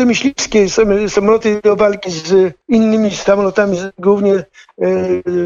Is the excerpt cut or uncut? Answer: cut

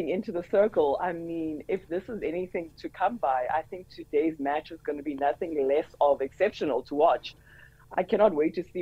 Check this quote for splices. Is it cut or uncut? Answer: uncut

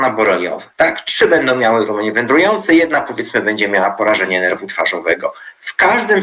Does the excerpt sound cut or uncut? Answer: uncut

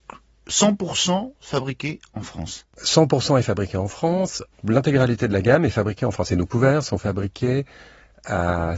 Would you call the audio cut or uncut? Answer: cut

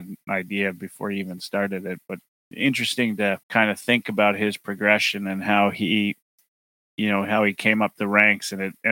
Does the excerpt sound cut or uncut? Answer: cut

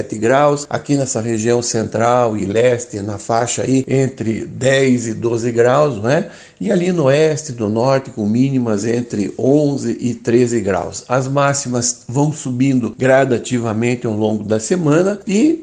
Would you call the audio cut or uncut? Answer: uncut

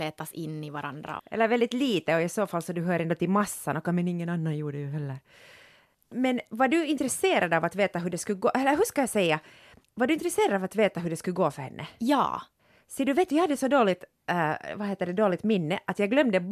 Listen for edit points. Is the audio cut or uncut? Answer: cut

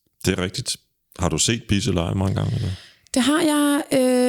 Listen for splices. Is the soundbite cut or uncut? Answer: uncut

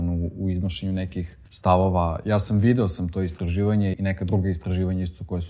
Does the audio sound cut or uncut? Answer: cut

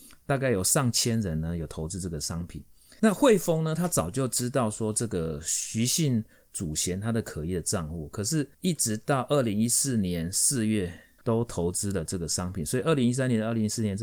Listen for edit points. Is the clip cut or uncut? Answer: cut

